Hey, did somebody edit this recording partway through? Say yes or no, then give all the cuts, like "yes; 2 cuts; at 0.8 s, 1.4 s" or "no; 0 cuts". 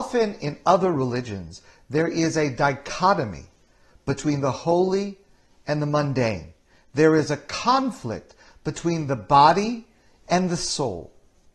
no; 0 cuts